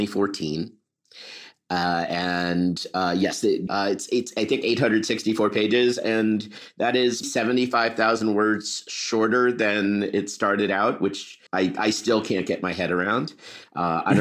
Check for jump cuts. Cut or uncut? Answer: cut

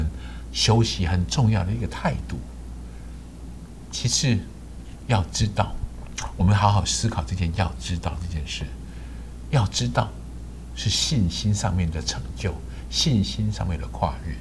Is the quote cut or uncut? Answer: uncut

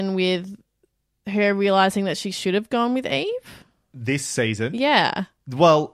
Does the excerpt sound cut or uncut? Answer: uncut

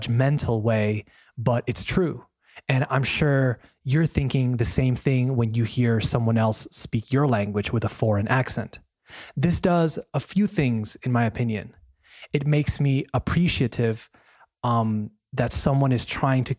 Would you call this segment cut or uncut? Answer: uncut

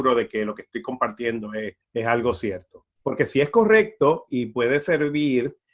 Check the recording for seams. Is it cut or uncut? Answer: cut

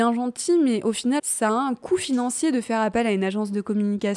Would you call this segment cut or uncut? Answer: cut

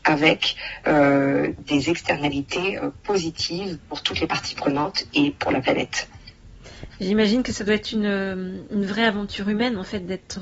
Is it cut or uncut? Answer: uncut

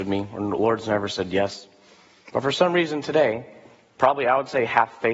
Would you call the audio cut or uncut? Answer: cut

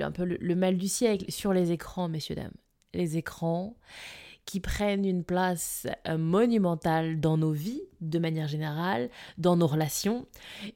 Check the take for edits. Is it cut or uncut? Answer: uncut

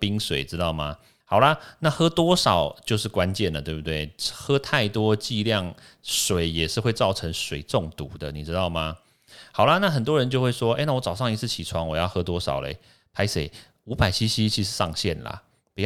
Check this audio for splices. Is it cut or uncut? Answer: uncut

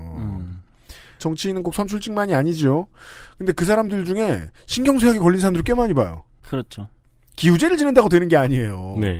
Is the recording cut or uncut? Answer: cut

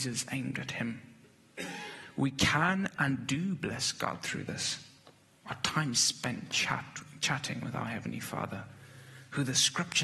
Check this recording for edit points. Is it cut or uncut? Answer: cut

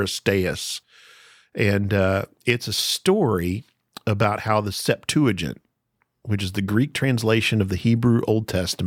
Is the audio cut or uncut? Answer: uncut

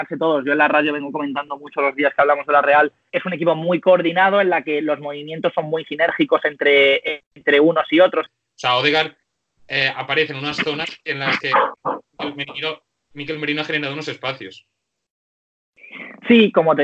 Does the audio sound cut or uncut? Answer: cut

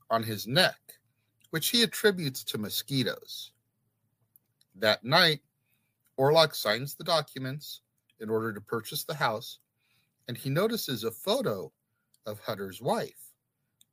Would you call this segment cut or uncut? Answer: uncut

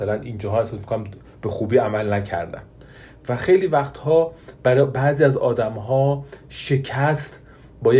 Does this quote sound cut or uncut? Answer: uncut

